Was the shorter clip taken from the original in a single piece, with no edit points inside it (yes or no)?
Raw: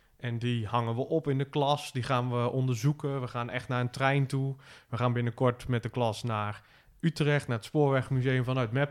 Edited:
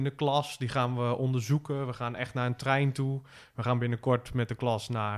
yes